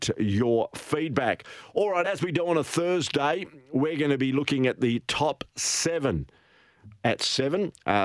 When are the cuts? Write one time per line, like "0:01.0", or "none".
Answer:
none